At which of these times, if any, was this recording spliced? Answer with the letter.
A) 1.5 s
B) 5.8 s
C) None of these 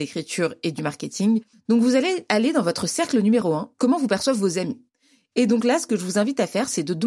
A